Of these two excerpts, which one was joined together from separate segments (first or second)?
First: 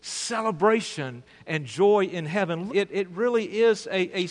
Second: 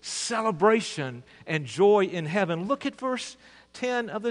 first